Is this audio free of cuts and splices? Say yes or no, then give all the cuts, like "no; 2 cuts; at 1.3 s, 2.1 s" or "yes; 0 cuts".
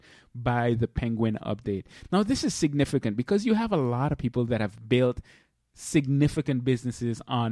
yes; 0 cuts